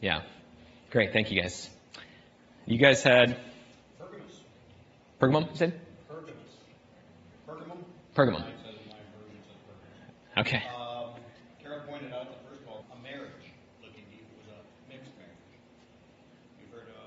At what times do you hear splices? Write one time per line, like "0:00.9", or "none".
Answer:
0:12.8